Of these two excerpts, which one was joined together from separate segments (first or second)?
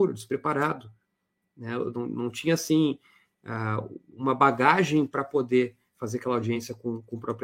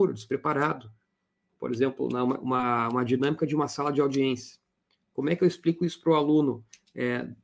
second